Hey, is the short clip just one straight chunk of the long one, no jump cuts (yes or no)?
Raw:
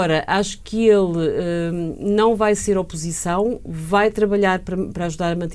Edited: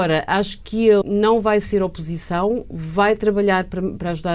no